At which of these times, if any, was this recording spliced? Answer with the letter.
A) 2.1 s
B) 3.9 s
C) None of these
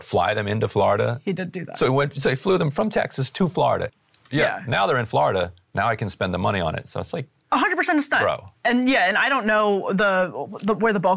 B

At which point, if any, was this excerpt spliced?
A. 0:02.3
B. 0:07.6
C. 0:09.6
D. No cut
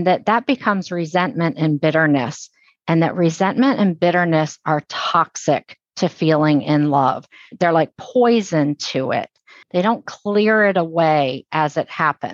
C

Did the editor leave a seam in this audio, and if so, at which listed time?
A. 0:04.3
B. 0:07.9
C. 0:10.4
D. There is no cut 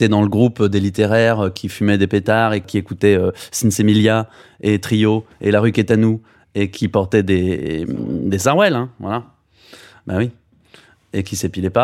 D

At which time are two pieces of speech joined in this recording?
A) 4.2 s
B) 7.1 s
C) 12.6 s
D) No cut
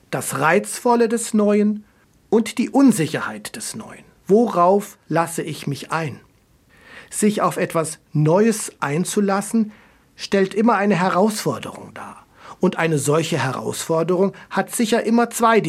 A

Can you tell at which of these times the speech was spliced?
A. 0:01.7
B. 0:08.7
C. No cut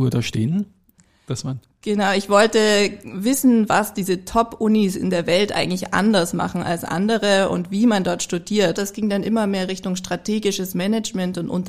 B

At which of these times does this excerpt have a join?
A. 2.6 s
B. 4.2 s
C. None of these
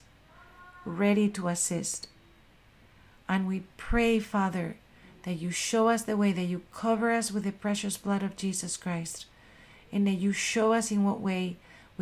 C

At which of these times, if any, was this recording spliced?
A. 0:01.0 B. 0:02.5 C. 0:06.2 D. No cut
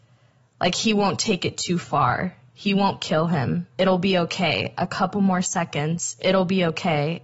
D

